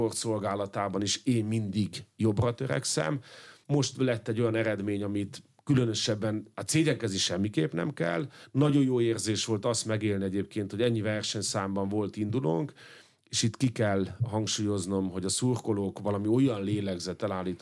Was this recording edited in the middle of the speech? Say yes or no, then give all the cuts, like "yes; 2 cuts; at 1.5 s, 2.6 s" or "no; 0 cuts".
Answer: yes; 1 cut; at 3.6 s